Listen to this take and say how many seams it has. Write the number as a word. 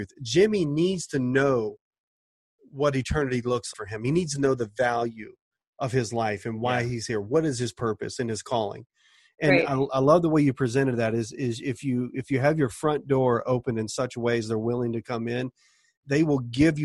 one